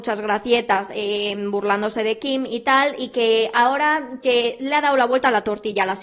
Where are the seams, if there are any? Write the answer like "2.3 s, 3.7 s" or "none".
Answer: 4.2 s